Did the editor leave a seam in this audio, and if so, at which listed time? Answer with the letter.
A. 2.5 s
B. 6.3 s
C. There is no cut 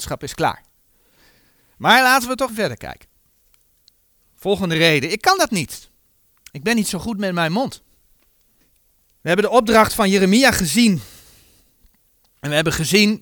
A